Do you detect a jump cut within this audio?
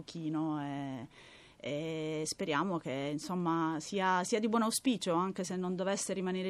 no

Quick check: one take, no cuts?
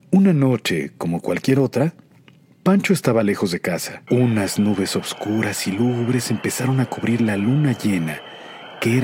no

